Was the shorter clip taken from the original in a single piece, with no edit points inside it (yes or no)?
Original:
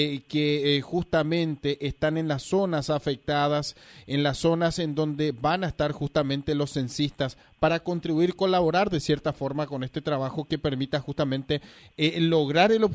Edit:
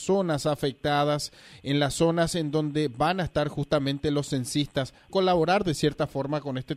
no